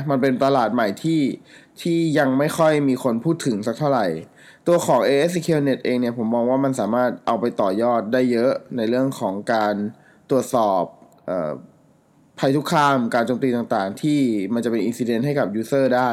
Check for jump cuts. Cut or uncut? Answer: uncut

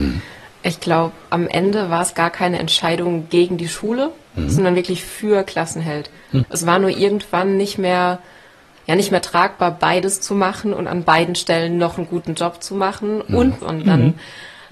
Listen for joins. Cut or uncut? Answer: cut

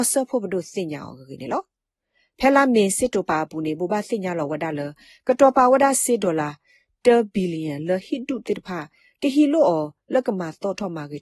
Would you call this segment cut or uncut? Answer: uncut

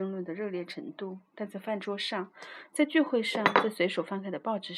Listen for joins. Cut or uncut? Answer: uncut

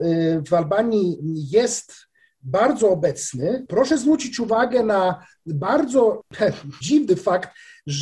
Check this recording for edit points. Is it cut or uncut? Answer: cut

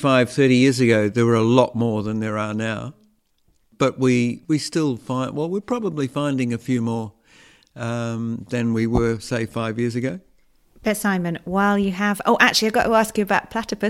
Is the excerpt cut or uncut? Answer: uncut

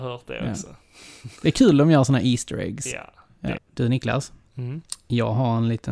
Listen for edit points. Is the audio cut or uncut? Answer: cut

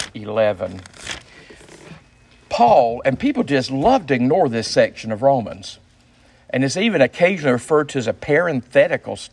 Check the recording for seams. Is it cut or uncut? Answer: uncut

